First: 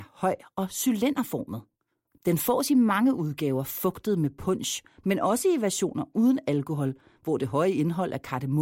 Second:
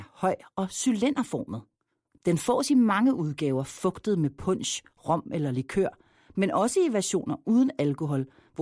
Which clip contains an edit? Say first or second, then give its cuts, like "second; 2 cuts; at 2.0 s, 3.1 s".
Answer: first; 1 cut; at 4.9 s